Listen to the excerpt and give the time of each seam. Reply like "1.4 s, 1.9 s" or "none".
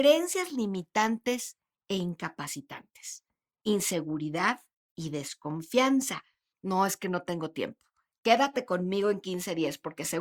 6.5 s